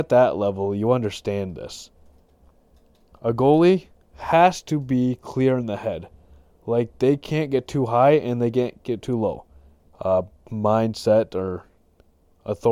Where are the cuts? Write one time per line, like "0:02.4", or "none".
0:09.9